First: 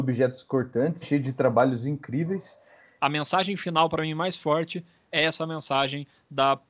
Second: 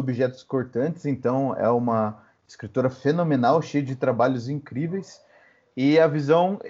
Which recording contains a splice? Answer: first; 2 cuts; at 1.0 s, 3.0 s

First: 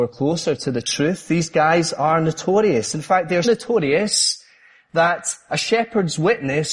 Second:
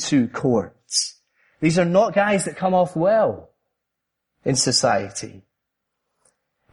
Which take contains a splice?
first; 1 cut; at 3.4 s

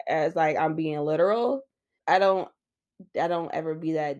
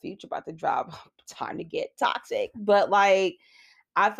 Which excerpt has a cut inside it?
first; 1 cut; at 2.0 s

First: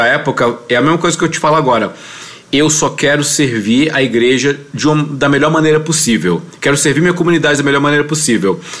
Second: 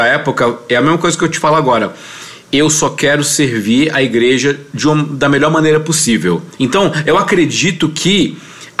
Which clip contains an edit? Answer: second; 1 cut; at 6.6 s

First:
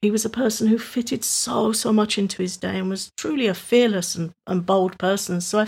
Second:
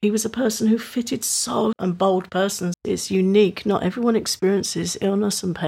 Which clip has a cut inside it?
second; 2 cuts; at 1.7 s, 2.7 s

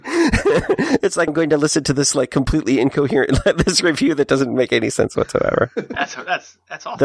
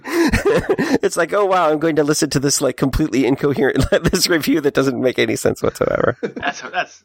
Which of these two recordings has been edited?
first; 1 cut; at 1.3 s

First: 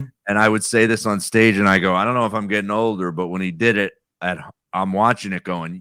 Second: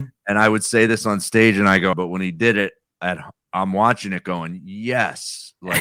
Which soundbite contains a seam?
second; 1 cut; at 1.9 s

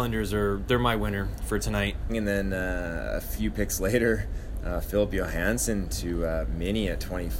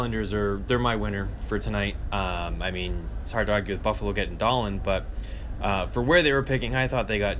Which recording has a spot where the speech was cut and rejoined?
first; 1 cut; at 2.1 s

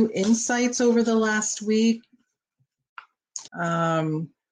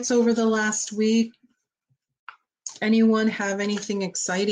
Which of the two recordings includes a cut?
first; 1 cut; at 3.5 s

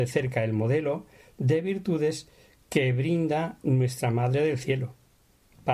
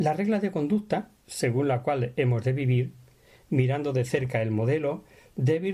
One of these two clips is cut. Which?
second; 1 cut; at 1.2 s

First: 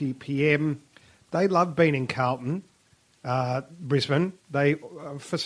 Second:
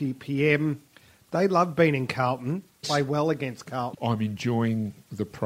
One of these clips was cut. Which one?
second; 2 cuts; at 2.8 s, 3.9 s

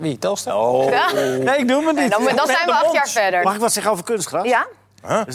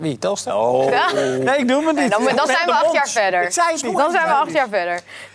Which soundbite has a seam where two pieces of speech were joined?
first; 1 cut; at 3.4 s

